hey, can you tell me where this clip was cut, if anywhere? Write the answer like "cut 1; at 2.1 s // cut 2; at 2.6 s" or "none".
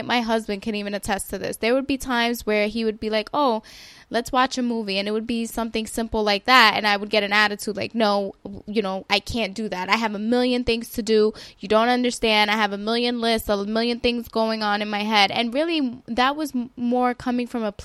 none